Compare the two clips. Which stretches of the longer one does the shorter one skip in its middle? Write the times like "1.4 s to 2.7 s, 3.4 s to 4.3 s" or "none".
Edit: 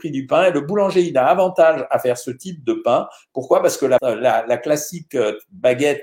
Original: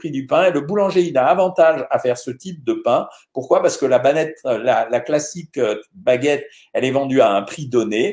4.0 s to 4.4 s